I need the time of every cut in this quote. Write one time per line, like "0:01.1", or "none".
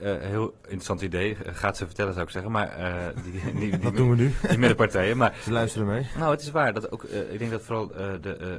none

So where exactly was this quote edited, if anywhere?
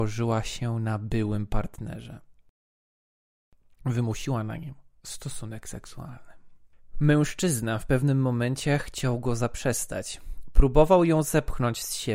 none

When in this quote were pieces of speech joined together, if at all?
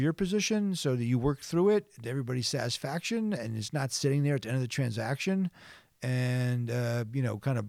none

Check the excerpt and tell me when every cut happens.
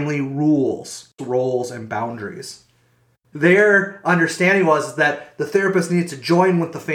0:01.2
0:03.3

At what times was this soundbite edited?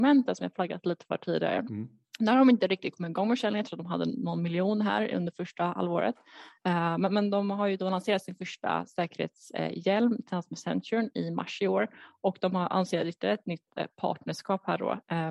none

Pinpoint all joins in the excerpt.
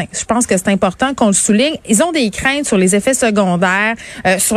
none

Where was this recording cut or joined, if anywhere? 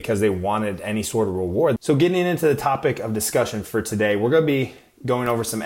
0:01.8

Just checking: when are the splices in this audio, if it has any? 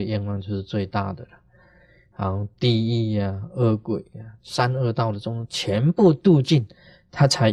0:04.4

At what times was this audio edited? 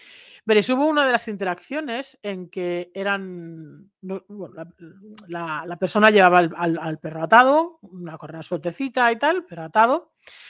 none

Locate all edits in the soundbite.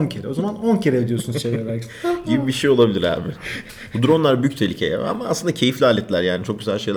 none

